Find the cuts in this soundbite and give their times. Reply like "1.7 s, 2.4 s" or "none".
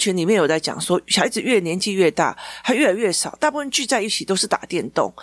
none

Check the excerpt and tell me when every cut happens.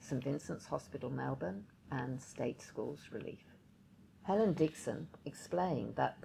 5.2 s

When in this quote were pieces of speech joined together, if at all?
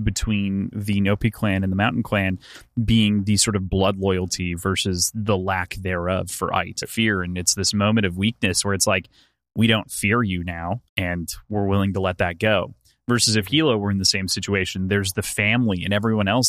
6.8 s, 10.9 s

